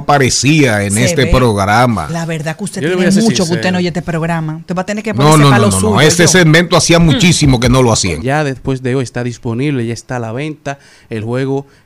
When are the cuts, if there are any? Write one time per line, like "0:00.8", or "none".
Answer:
0:08.2